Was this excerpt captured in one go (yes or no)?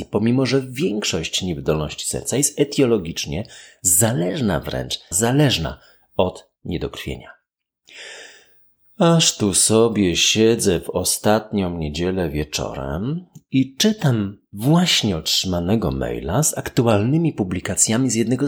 no